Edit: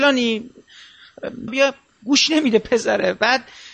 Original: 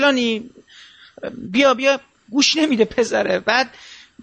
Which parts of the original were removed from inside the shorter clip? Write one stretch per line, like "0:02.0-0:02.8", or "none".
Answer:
0:01.5-0:01.7